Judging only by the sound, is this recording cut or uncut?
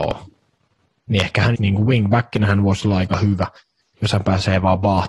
cut